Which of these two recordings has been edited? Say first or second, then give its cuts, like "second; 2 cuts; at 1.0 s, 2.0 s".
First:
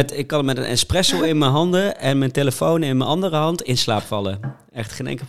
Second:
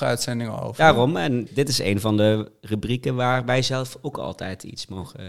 second; 1 cut; at 1.5 s